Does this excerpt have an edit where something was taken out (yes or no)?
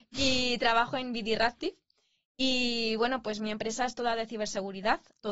no